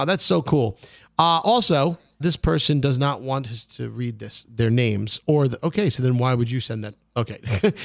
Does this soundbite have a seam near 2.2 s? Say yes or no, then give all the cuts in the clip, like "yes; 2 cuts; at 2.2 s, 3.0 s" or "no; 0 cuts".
yes; 1 cut; at 2.2 s